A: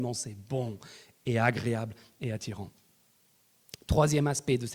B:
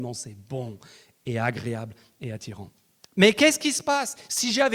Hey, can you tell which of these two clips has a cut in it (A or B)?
B